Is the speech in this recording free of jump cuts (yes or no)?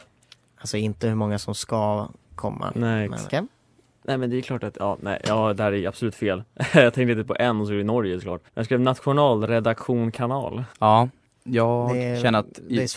no